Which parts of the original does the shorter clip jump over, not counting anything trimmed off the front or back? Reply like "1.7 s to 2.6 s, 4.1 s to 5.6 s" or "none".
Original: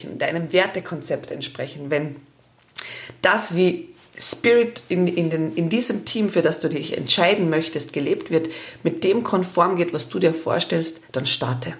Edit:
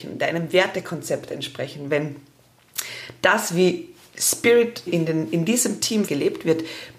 4.9 s to 5.1 s, 6.3 s to 7.9 s